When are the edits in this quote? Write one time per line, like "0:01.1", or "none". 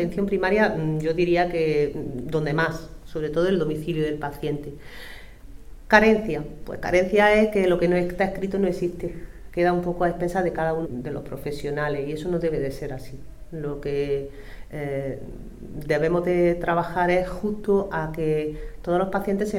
0:09.5
0:10.8